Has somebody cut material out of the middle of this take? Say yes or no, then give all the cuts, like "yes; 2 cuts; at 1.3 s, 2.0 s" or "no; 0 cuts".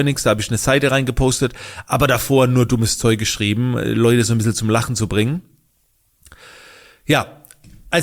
no; 0 cuts